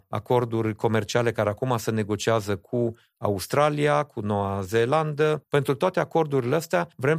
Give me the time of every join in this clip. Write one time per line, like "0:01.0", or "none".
0:05.4